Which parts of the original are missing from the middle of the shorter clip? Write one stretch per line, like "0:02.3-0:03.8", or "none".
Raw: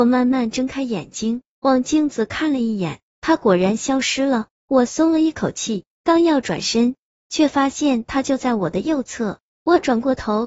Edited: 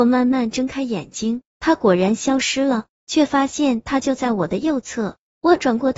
0:01.5-0:03.1
0:04.6-0:07.2

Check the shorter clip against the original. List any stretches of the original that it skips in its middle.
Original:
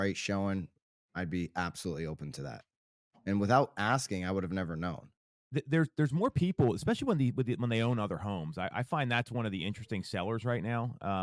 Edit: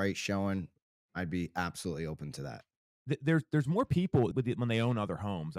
0:02.9-0:05.3
0:06.8-0:07.3

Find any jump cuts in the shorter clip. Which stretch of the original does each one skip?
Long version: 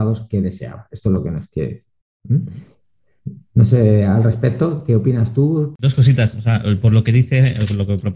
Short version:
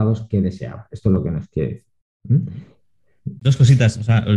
0:03.4-0:05.8

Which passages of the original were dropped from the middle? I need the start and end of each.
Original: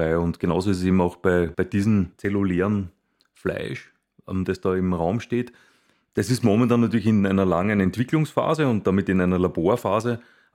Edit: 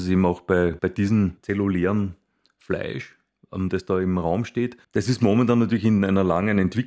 0:05.6-0:06.1

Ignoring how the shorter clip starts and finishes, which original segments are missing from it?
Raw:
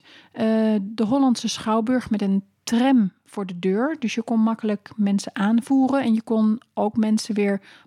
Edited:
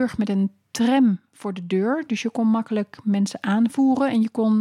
none

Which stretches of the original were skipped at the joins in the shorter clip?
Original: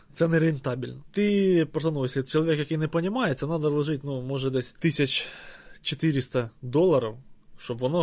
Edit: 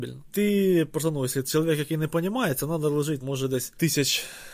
0:04.0-0:04.2

